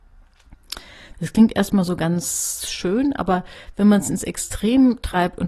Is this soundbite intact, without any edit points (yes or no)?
no